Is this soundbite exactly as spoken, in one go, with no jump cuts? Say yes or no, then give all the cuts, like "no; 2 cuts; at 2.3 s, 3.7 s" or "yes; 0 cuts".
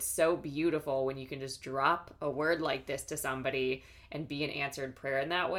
yes; 0 cuts